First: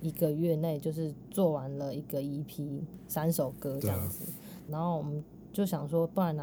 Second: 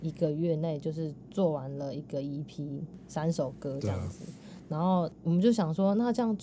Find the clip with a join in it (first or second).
first